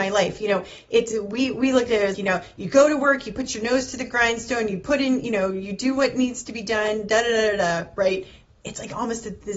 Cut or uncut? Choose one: cut